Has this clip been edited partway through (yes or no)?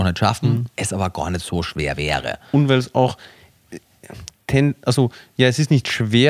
no